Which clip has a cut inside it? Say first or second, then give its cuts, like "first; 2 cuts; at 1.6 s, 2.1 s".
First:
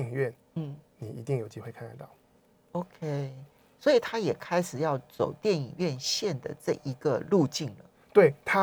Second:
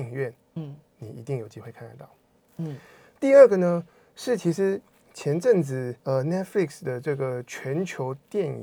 second; 2 cuts; at 2.5 s, 6.0 s